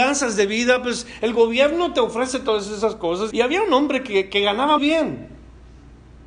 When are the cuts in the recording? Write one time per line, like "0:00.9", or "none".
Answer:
0:03.3
0:04.8